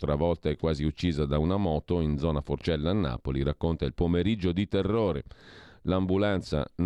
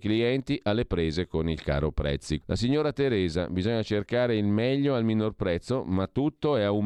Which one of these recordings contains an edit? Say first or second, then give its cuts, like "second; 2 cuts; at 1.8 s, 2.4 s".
second; 1 cut; at 2.4 s